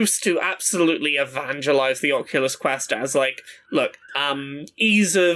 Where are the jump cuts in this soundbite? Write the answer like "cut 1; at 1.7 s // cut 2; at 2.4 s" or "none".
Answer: cut 1; at 4.1 s